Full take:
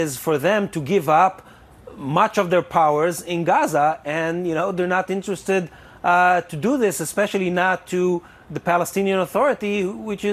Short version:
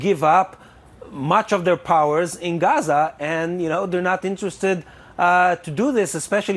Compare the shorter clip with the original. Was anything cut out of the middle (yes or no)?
no